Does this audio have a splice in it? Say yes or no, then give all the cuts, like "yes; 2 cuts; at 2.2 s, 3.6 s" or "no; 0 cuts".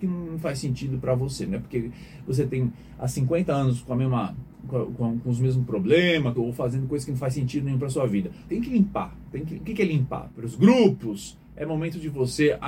yes; 3 cuts; at 6.3 s, 8.5 s, 10.3 s